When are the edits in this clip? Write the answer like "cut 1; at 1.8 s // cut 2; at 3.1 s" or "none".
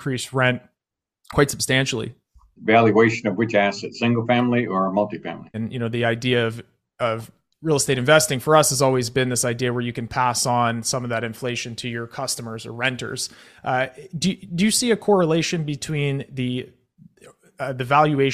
cut 1; at 2.6 s // cut 2; at 5.5 s